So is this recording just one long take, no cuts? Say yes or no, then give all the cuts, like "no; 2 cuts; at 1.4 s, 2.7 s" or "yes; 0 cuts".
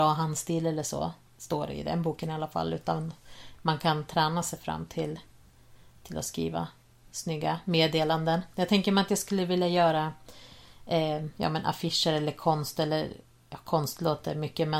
yes; 0 cuts